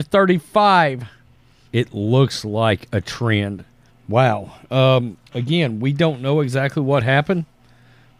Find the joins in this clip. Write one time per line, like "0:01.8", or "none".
0:01.7
0:03.9
0:05.3